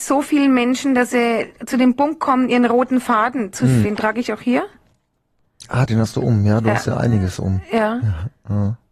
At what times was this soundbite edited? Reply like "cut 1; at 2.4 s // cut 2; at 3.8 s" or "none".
cut 1; at 3.8 s